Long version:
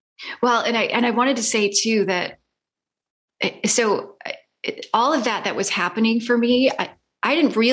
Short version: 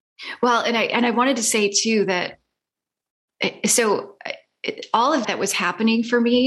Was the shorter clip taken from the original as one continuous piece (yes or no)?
no